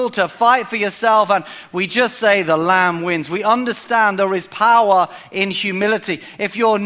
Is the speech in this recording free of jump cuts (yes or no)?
yes